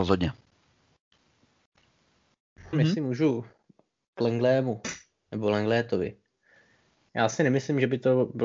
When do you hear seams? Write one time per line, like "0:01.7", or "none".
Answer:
0:02.7